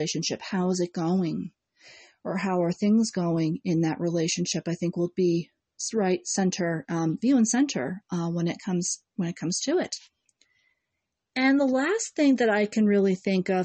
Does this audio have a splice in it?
no; 0 cuts

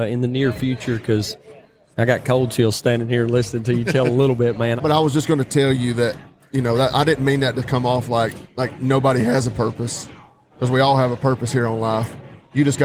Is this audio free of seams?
no; 1 cut; at 4.8 s

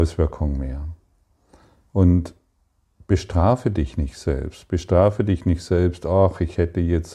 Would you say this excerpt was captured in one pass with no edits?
yes; 0 cuts

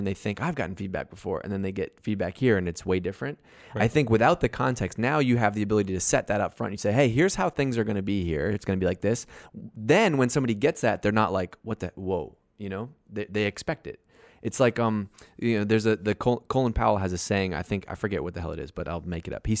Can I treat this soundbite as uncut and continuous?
yes; 0 cuts

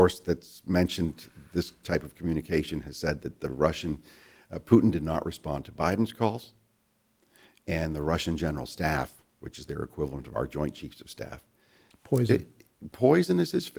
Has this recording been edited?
yes; 1 cut; at 11.9 s

